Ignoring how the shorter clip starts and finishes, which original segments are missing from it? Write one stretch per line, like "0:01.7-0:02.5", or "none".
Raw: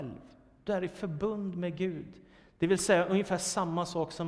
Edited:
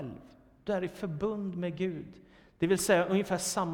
none